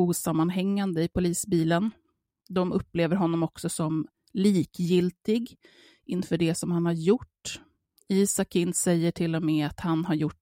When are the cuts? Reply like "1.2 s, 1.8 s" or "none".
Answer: none